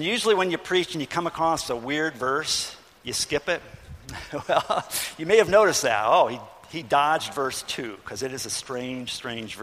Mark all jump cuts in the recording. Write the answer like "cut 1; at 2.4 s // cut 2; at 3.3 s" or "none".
none